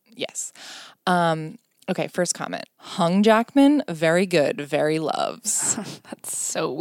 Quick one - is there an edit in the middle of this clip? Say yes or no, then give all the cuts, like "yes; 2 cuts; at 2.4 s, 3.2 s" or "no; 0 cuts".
yes; 1 cut; at 2.7 s